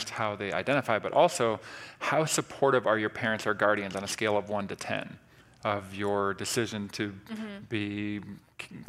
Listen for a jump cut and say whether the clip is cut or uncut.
uncut